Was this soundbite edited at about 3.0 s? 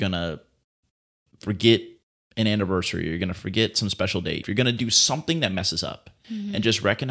no; 1 cut; at 4.4 s

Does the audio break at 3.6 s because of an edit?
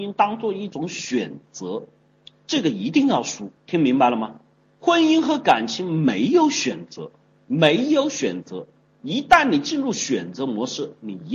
yes; 1 cut; at 3.6 s

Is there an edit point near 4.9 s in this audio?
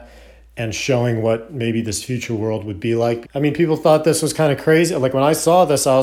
no; 1 cut; at 3.2 s

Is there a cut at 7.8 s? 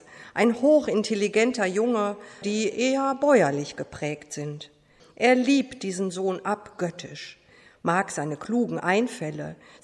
no; 2 cuts; at 2.4 s, 5.0 s

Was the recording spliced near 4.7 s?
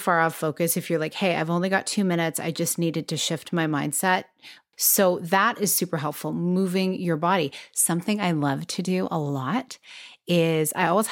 yes; 1 cut; at 4.7 s

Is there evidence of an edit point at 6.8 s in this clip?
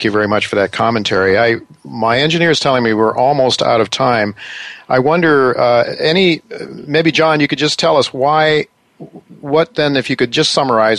no; 0 cuts

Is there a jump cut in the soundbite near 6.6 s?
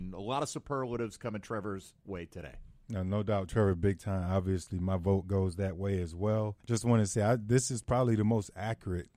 yes; 1 cut; at 6.6 s

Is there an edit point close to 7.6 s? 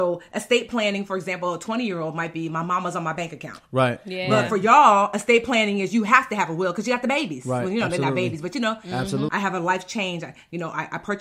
no; 1 cut; at 9.3 s

